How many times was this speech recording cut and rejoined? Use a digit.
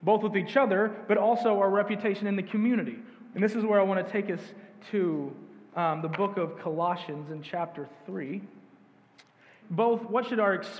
2